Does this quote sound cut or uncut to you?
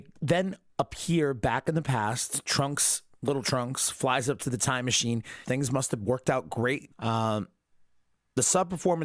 cut